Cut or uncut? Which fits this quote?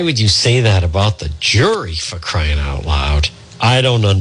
uncut